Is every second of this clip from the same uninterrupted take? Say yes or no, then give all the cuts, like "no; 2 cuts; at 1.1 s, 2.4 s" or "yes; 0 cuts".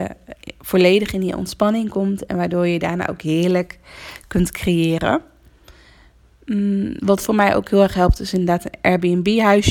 yes; 0 cuts